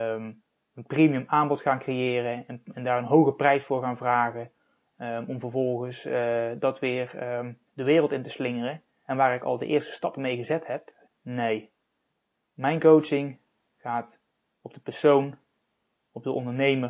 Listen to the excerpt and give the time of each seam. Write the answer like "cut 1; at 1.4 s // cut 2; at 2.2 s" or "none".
cut 1; at 2.7 s // cut 2; at 9.0 s // cut 3; at 11.1 s